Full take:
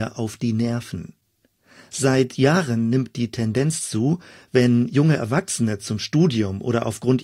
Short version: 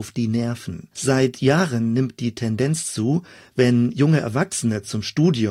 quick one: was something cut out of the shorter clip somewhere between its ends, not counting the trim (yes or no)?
yes